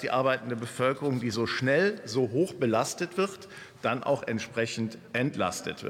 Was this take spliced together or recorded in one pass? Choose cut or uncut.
uncut